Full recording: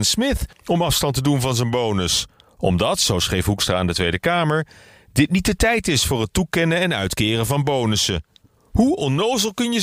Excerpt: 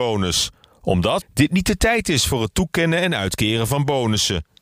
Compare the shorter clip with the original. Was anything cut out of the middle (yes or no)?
yes